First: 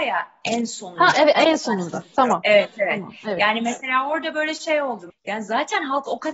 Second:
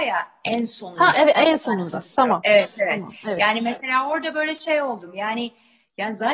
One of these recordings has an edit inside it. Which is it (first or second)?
first